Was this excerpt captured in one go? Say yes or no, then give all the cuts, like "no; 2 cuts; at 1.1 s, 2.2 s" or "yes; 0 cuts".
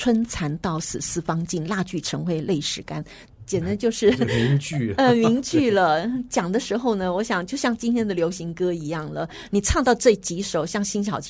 yes; 0 cuts